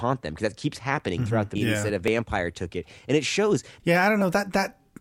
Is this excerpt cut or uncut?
cut